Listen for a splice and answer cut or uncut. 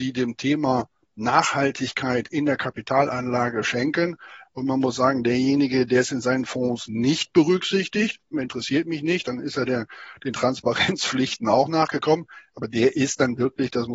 cut